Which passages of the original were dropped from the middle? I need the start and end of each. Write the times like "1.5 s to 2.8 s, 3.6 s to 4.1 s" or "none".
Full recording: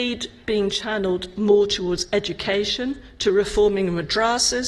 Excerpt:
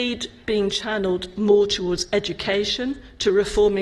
none